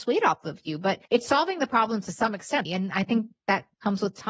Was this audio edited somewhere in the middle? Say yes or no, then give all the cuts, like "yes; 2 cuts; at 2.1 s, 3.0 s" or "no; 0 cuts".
yes; 2 cuts; at 1.1 s, 2.7 s